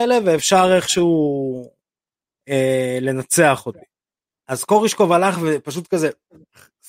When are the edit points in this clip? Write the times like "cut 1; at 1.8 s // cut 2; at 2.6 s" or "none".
cut 1; at 4.4 s

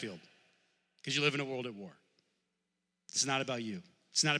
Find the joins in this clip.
none

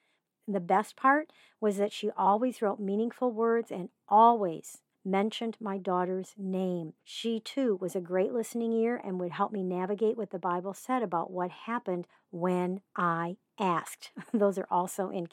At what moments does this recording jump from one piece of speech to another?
cut 1; at 4.9 s // cut 2; at 7.0 s

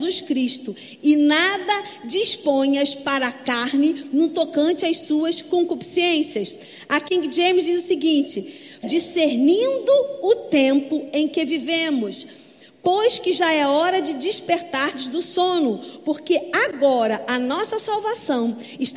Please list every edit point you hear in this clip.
cut 1; at 8.8 s

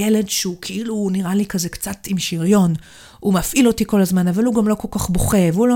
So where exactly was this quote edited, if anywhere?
none

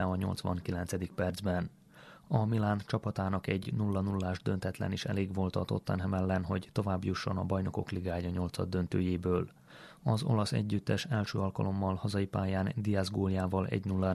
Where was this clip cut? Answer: none

